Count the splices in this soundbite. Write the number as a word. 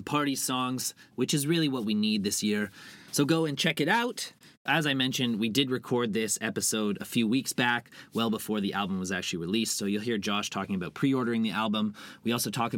one